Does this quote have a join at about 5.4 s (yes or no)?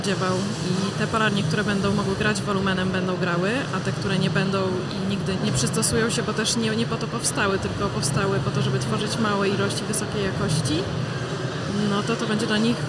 yes